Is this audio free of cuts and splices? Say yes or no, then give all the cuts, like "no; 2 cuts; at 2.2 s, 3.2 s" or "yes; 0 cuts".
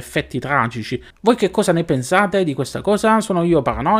no; 1 cut; at 1.1 s